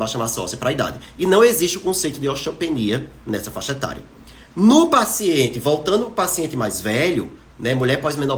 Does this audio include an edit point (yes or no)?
no